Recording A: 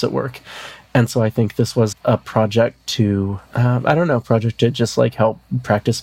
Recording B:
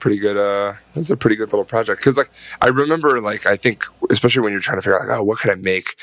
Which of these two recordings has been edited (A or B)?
A